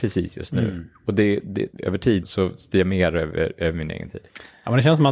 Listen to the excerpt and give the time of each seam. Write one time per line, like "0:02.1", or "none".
0:02.2